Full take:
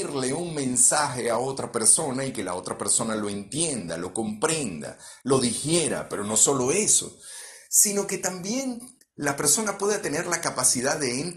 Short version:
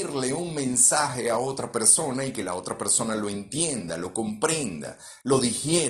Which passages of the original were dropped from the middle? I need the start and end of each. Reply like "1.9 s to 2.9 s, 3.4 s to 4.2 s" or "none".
none